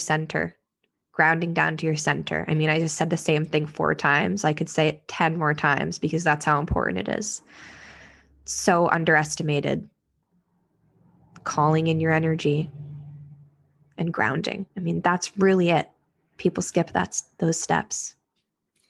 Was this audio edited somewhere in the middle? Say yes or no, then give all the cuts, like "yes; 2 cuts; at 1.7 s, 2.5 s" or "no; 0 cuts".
no; 0 cuts